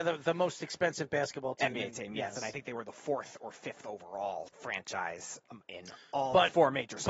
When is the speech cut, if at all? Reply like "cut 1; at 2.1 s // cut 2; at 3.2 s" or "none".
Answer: cut 1; at 4.5 s